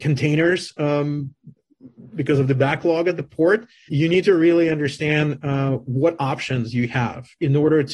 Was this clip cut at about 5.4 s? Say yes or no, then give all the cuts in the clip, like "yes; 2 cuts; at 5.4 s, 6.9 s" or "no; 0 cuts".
no; 1 cut; at 3.9 s